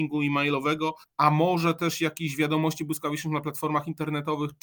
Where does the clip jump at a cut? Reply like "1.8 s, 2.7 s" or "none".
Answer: 1.0 s